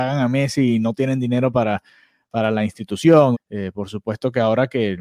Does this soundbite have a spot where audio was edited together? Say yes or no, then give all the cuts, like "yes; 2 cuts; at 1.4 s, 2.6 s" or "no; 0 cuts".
yes; 1 cut; at 3.3 s